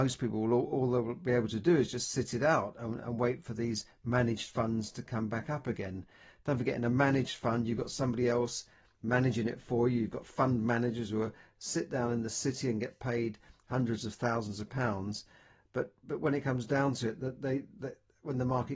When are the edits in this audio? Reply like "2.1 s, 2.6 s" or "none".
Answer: none